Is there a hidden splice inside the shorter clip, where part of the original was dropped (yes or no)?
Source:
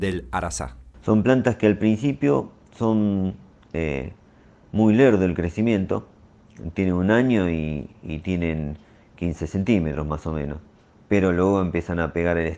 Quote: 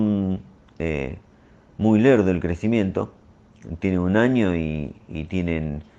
no